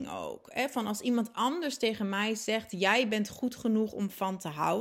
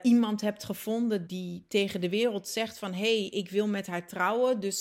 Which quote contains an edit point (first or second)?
second